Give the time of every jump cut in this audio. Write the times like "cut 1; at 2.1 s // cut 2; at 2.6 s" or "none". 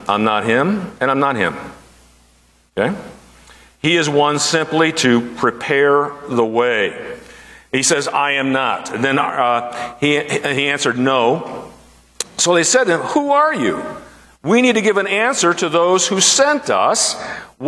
none